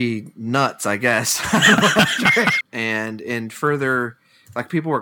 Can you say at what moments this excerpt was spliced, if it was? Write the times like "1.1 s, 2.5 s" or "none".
2.6 s